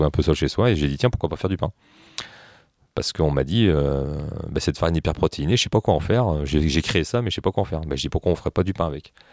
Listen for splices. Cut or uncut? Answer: uncut